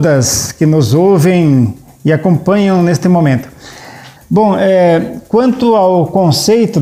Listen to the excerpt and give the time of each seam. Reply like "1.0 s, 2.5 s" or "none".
4.2 s